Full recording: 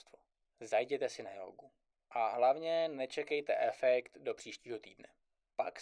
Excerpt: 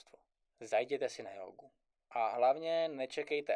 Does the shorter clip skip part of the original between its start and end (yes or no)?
no